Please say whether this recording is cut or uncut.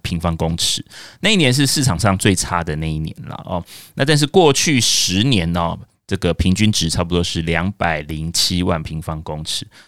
uncut